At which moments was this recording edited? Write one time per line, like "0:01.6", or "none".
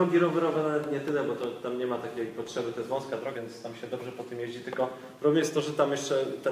0:03.3